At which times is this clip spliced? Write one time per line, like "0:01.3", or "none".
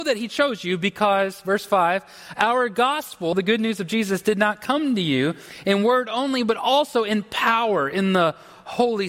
none